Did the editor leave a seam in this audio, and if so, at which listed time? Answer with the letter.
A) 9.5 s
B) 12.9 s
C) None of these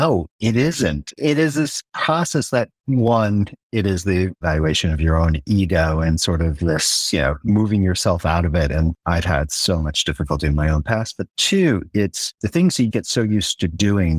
B